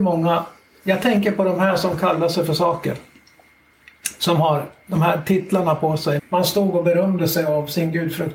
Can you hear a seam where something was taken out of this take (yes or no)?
yes